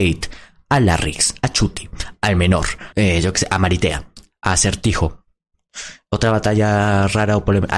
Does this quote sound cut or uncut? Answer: cut